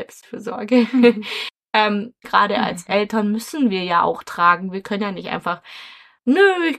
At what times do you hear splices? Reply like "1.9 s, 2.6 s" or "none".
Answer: 2.2 s